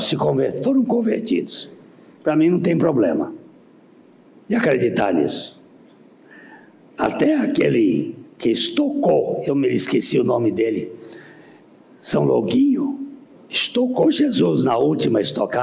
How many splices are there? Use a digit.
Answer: 1